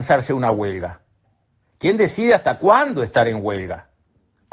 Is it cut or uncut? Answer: uncut